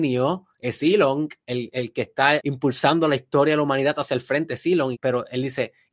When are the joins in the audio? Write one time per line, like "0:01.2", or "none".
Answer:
0:02.4
0:04.9